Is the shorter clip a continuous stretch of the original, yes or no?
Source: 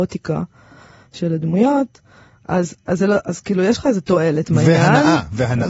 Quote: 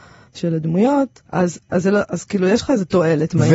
no